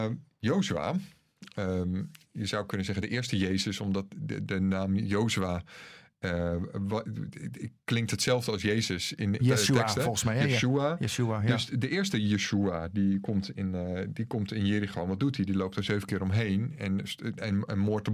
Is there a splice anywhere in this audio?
yes; 1 cut; at 9.4 s

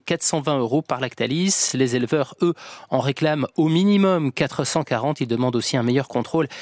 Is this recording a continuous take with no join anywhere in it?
yes; 0 cuts

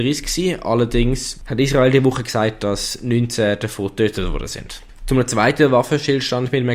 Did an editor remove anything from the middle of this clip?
no; 0 cuts

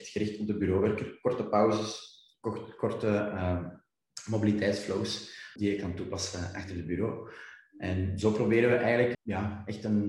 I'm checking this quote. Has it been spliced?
yes; 2 cuts; at 5.6 s, 9.1 s

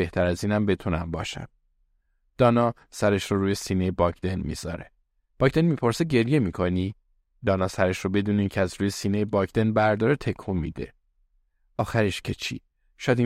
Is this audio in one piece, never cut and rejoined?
yes; 0 cuts

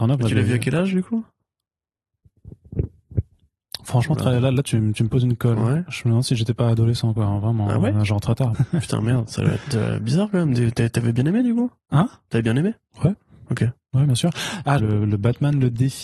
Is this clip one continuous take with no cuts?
no; 2 cuts; at 8.5 s, 14.8 s

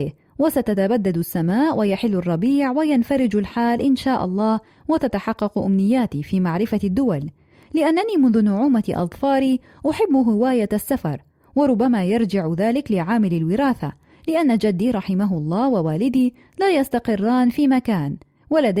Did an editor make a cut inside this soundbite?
no; 0 cuts

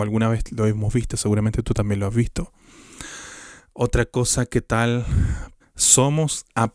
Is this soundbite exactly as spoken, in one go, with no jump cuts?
no; 1 cut; at 5.6 s

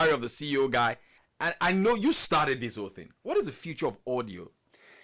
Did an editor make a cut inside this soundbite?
no; 0 cuts

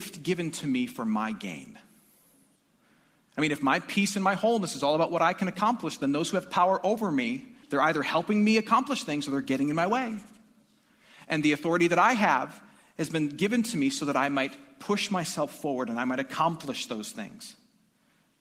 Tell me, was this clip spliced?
yes; 1 cut; at 7.6 s

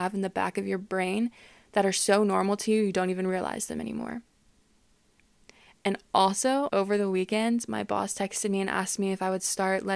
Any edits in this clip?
yes; 1 cut; at 6.7 s

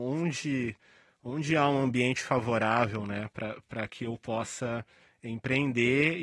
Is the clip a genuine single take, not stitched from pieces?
yes; 0 cuts

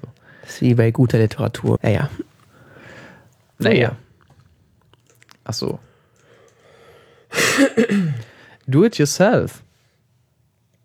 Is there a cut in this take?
yes; 2 cuts; at 1.8 s, 3.5 s

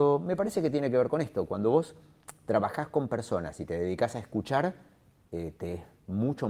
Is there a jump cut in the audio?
no; 0 cuts

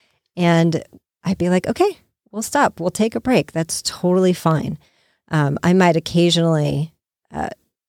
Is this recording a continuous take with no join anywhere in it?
yes; 0 cuts

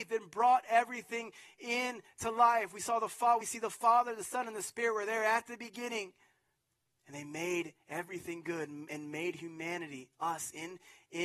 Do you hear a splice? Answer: no; 0 cuts

